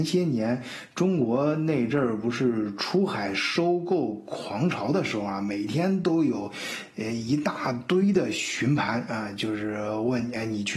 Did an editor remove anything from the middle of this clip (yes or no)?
no